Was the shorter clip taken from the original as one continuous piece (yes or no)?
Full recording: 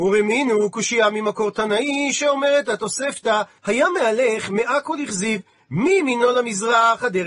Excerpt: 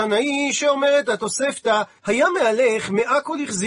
yes